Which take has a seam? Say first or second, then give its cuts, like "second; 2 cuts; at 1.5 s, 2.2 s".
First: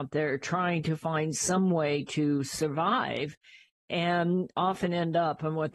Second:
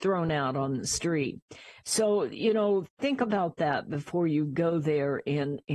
second; 1 cut; at 1.8 s